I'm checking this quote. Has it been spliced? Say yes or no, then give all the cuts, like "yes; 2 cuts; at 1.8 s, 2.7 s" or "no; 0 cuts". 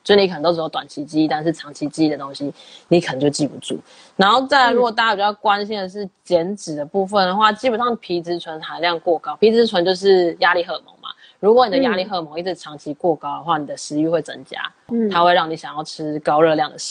no; 0 cuts